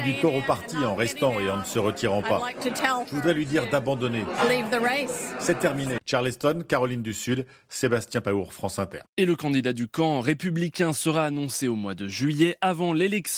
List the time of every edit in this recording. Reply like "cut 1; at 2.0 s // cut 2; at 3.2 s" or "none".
cut 1; at 6.0 s